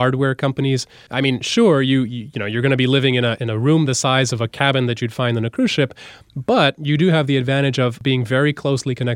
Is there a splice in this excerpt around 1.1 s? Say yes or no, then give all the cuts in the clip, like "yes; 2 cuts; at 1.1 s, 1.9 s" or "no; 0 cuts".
yes; 1 cut; at 1.1 s